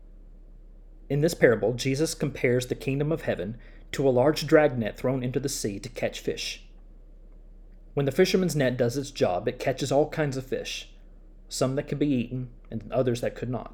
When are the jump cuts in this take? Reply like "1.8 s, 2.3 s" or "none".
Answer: none